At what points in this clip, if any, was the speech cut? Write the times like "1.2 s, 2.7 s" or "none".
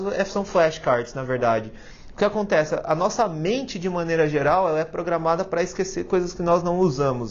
none